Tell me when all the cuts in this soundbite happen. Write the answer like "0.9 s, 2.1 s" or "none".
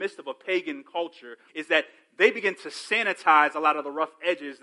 1.5 s